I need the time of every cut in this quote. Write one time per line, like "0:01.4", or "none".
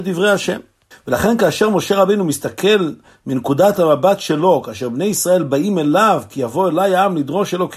0:00.9